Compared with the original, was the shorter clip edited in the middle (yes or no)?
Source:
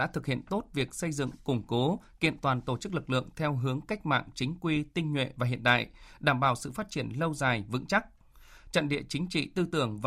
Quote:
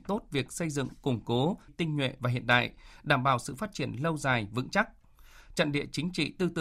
yes